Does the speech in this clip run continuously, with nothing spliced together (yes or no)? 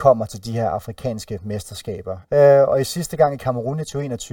no